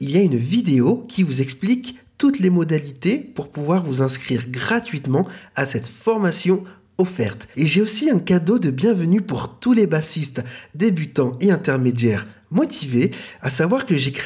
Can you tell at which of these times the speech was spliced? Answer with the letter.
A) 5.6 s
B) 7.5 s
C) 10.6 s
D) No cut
B